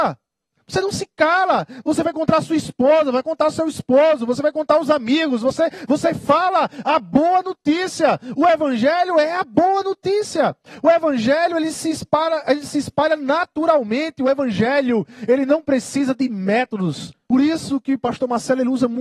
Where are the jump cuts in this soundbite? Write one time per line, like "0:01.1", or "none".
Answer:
0:17.3